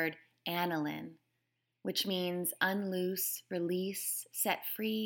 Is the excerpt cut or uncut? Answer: uncut